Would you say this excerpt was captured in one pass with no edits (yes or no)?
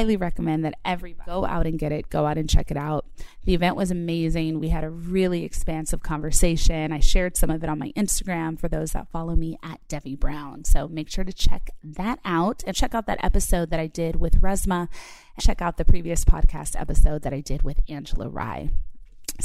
no